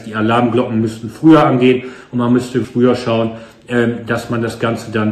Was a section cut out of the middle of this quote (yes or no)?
yes